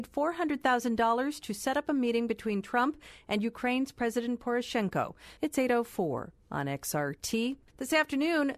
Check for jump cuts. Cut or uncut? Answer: cut